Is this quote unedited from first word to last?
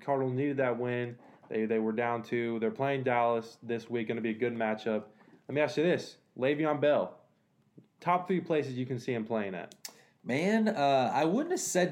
yes; 0 cuts

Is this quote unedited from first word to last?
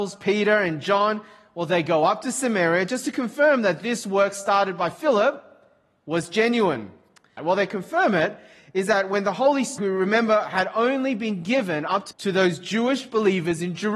no; 3 cuts; at 7.4 s, 9.8 s, 12.1 s

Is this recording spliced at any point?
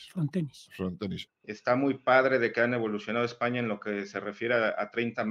yes; 1 cut; at 1.3 s

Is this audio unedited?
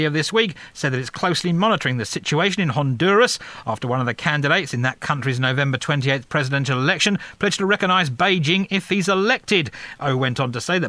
no; 1 cut; at 10.0 s

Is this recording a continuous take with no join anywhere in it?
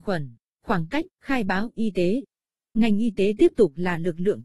no; 2 cuts; at 1.1 s, 2.7 s

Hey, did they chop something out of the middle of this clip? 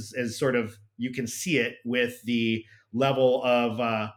no; 0 cuts

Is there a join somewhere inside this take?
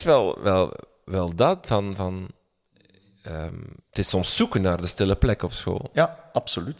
no; 0 cuts

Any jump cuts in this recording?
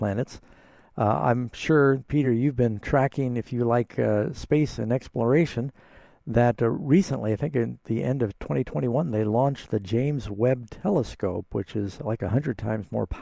no; 0 cuts

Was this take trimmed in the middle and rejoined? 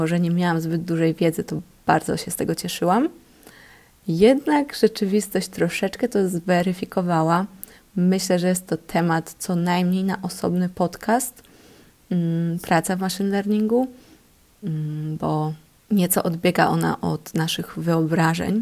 no; 0 cuts

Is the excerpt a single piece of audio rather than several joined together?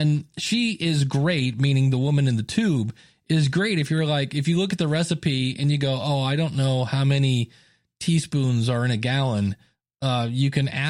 yes; 0 cuts

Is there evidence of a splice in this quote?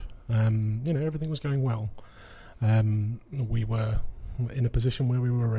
no; 0 cuts

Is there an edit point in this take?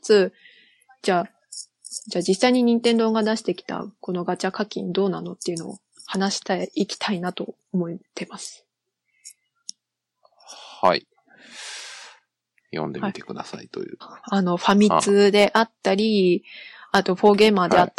yes; 2 cuts; at 12.6 s, 14.0 s

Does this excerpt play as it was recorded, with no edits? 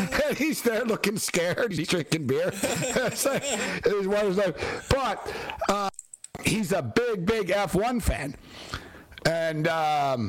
yes; 0 cuts

